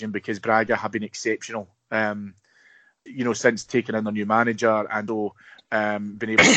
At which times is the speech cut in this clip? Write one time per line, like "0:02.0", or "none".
0:03.1
0:05.1

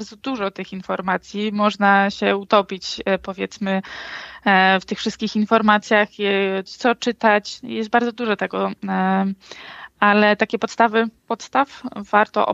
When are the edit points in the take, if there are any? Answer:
0:06.7
0:11.2

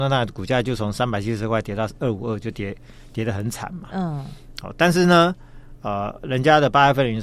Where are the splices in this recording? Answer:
none

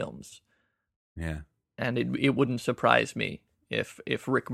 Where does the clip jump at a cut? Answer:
none

